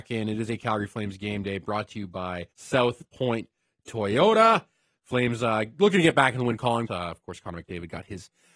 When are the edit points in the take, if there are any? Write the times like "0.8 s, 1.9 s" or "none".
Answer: 2.5 s, 6.9 s